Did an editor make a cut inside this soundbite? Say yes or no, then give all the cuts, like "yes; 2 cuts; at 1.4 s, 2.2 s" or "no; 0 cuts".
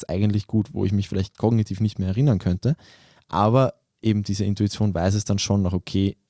no; 0 cuts